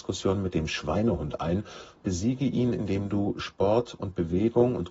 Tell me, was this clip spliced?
yes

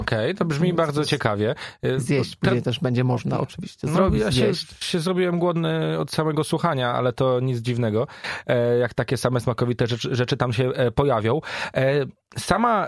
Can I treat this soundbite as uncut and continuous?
yes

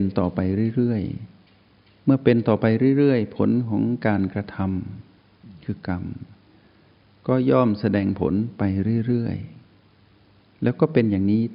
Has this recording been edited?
no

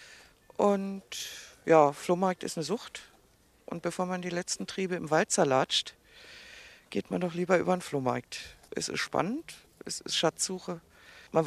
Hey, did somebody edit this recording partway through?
no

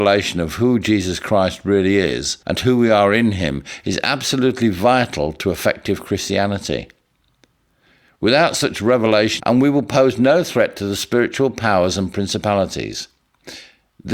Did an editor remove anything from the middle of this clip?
yes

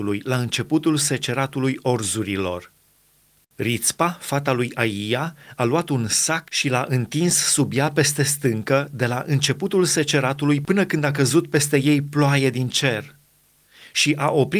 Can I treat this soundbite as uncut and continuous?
yes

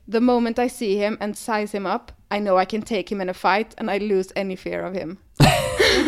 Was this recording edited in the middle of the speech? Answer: no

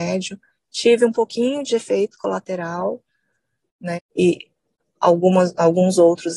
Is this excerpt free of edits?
no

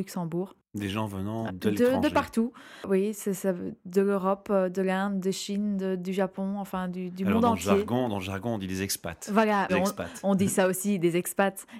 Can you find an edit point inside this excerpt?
yes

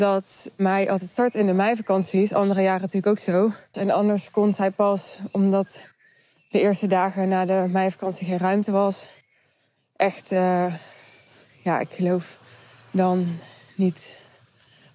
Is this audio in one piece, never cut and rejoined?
no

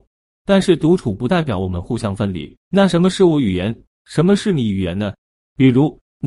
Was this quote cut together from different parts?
yes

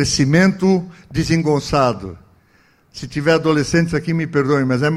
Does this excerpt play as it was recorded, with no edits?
yes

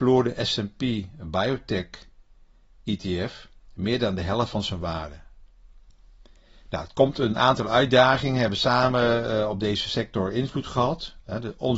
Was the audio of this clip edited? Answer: no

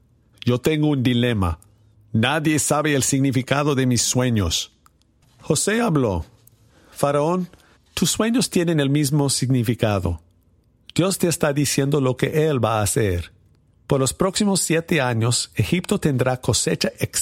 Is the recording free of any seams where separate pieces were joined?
yes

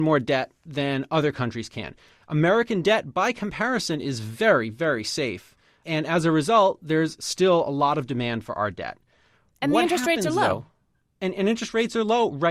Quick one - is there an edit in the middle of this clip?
no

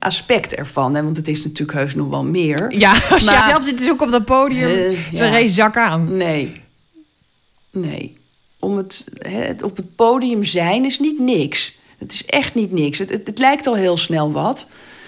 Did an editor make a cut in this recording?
yes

